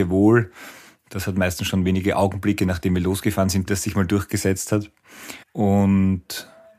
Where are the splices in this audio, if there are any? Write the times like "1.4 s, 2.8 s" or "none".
3.7 s, 5.4 s